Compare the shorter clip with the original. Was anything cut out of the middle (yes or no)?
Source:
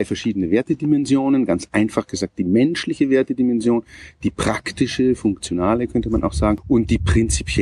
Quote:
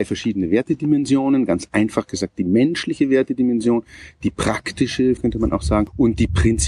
yes